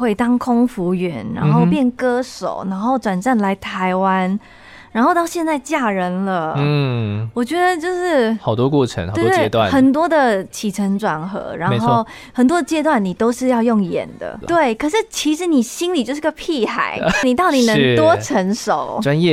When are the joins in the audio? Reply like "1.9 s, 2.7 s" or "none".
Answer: 14.4 s, 17.2 s